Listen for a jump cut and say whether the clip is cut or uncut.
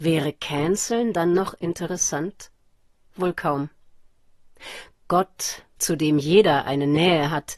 cut